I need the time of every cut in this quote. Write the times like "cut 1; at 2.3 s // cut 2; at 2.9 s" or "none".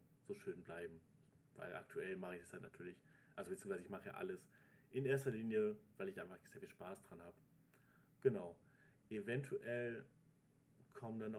none